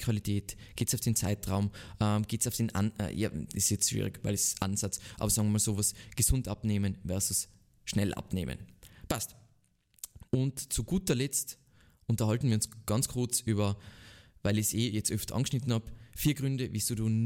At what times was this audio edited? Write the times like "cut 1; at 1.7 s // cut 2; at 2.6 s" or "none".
cut 1; at 10.3 s

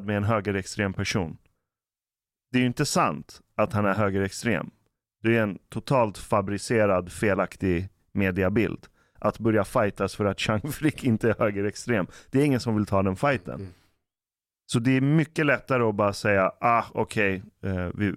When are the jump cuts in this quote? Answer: cut 1; at 9.2 s

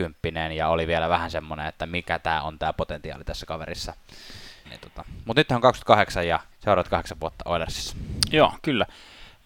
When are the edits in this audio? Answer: cut 1; at 4.6 s // cut 2; at 6.5 s

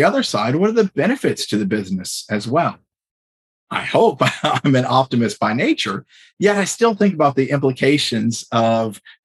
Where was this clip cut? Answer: none

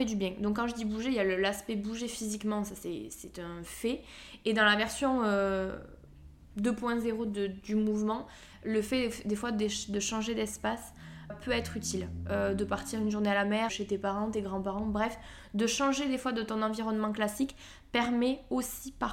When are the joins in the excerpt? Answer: cut 1; at 11.3 s // cut 2; at 13.7 s

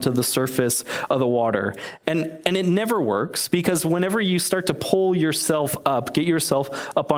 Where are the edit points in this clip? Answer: none

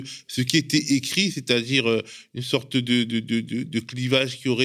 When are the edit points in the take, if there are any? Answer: none

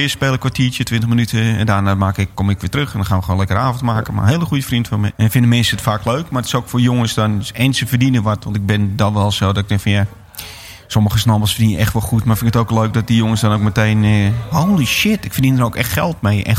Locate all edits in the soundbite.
cut 1; at 2.3 s // cut 2; at 5.1 s

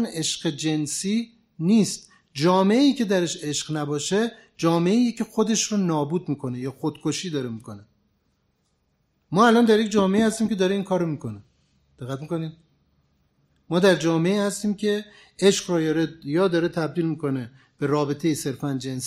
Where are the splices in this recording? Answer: none

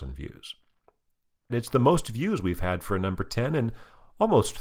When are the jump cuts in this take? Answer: cut 1; at 1.5 s

